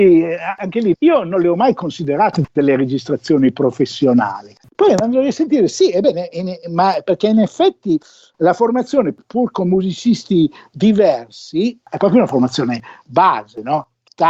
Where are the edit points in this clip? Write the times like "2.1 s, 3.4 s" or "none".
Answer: 0.9 s